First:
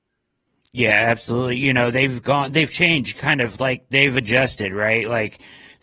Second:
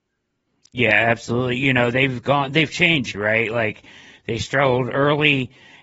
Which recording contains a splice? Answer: second; 1 cut; at 3.1 s

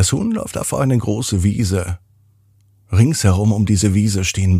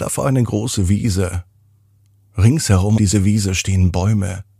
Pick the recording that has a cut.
second; 1 cut; at 3.0 s

